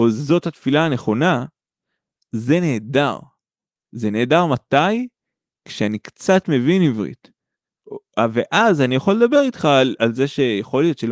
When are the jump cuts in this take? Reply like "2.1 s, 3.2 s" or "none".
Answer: none